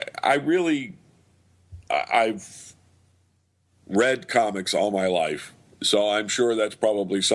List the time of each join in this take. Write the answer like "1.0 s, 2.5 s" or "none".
none